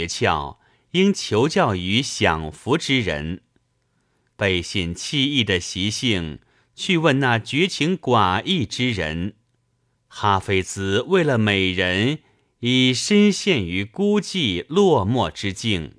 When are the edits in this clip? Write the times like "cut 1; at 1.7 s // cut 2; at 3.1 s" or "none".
cut 1; at 4.3 s // cut 2; at 9.9 s